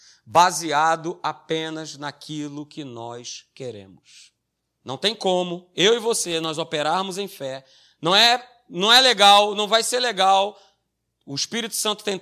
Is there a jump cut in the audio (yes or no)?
yes